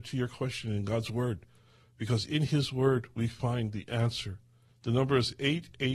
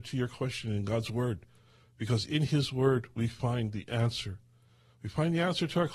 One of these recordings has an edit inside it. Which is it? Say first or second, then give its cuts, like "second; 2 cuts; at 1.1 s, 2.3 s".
first; 1 cut; at 4.7 s